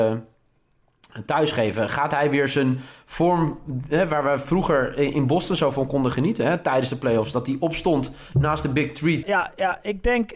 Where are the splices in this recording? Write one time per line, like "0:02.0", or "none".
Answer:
0:09.2